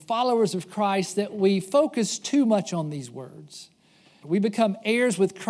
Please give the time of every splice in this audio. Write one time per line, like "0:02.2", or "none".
0:04.2